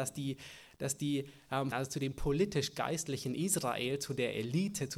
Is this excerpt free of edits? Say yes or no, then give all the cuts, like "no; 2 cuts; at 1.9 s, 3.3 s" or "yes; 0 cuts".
no; 1 cut; at 1.7 s